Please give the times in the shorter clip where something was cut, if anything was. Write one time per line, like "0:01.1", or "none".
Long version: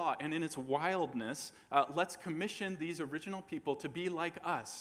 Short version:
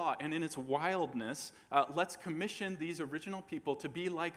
none